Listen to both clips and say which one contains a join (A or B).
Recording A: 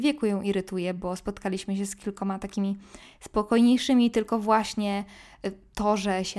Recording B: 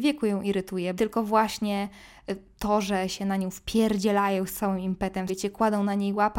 B